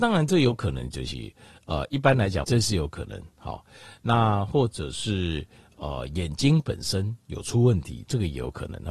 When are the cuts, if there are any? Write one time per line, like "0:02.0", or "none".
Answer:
0:02.4